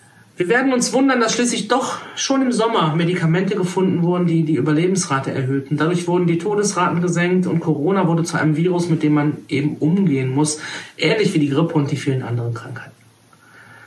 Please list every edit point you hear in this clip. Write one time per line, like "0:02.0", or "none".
none